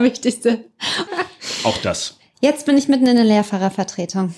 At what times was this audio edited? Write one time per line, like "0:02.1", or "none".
0:01.1